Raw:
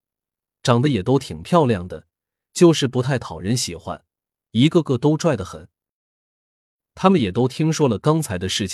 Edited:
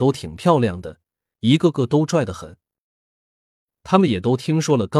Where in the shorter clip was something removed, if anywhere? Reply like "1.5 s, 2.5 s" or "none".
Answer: 1.3 s